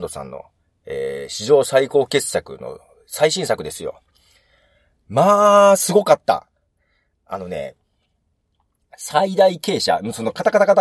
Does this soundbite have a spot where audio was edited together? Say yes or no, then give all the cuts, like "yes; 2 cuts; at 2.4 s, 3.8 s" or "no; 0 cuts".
no; 0 cuts